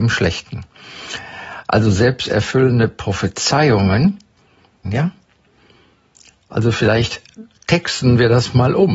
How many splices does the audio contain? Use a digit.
1